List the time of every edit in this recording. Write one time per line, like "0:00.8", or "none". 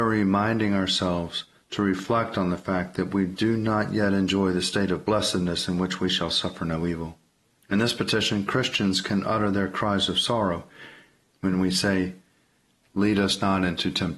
0:07.6
0:11.3